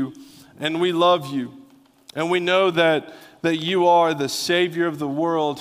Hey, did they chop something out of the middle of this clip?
no; 0 cuts

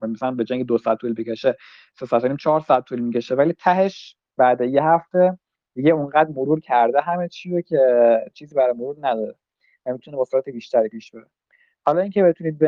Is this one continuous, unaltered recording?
yes; 0 cuts

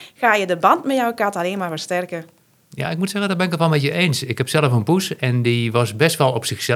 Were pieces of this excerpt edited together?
no; 0 cuts

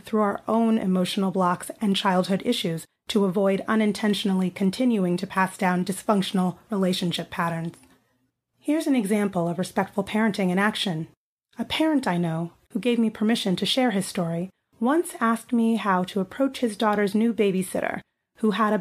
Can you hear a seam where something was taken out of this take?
yes; 1 cut; at 12.6 s

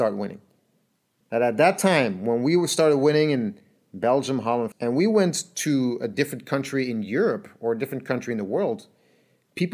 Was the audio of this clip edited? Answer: yes; 2 cuts; at 1.2 s, 4.7 s

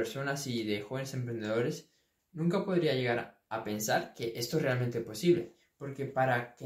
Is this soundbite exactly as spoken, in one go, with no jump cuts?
yes; 0 cuts

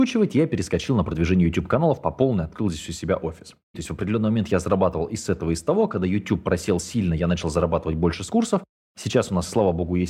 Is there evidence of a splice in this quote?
yes; 1 cut; at 3.7 s

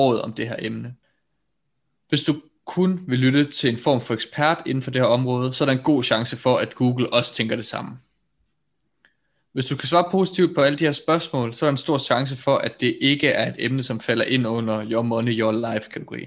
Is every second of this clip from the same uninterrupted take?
yes; 0 cuts

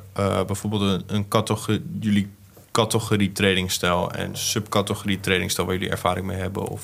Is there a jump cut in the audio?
no; 0 cuts

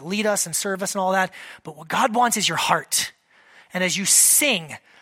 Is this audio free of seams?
yes; 0 cuts

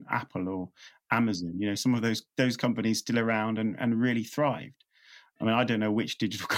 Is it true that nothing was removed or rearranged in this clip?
yes; 0 cuts

